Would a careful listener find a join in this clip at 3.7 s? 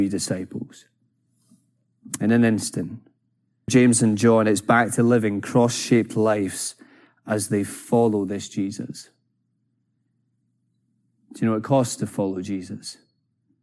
yes; 1 cut; at 3.7 s

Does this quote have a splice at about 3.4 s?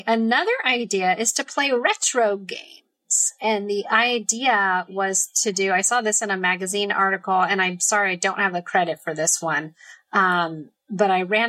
no; 0 cuts

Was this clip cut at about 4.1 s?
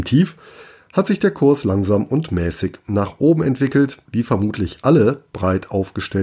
yes; 1 cut; at 4.1 s

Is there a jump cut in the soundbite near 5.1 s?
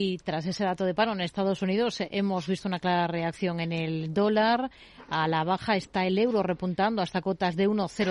no; 0 cuts

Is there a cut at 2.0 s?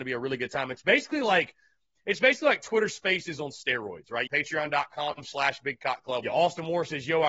no; 2 cuts; at 4.3 s, 6.2 s

